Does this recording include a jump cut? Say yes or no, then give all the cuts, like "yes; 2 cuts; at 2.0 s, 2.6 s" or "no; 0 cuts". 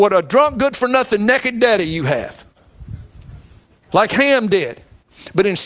no; 0 cuts